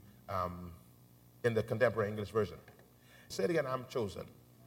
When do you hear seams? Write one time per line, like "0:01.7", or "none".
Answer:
0:03.3